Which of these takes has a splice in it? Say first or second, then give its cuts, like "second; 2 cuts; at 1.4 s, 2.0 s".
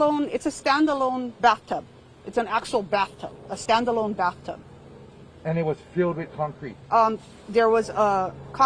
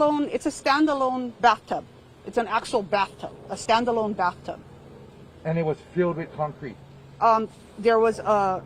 first; 1 cut; at 6.8 s